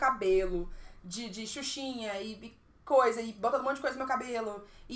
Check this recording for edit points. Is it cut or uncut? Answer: uncut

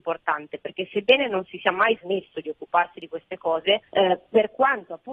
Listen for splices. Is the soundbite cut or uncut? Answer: cut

